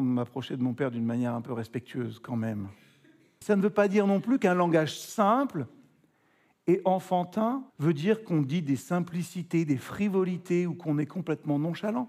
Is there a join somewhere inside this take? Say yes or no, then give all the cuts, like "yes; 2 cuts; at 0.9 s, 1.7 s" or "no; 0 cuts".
yes; 2 cuts; at 3.4 s, 7.7 s